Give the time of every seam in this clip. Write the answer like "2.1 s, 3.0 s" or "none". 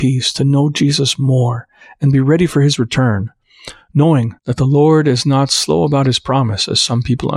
4.4 s

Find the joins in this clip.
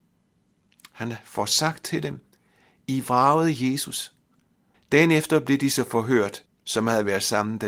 4.7 s, 6.5 s

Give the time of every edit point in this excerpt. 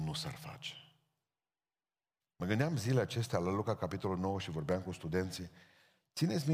2.2 s

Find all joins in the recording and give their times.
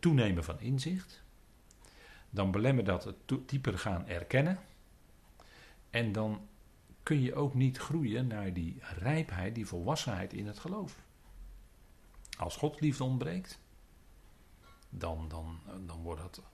3.5 s

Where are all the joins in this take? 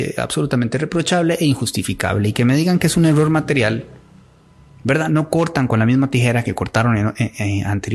none

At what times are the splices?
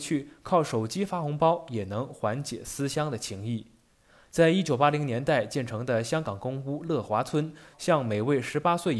7.7 s

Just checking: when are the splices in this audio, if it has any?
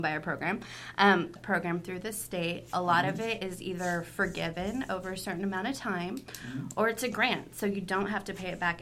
1.4 s

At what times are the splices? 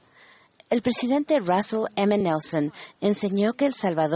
none

